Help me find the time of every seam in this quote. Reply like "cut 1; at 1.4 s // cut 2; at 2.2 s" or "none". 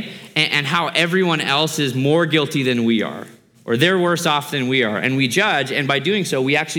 none